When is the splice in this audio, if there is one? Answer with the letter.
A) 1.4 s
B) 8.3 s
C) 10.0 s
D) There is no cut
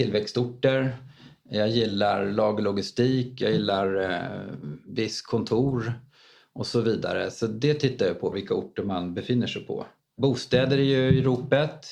B